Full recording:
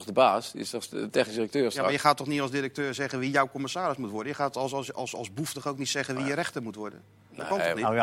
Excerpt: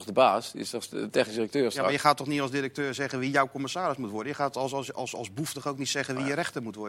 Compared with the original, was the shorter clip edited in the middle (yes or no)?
no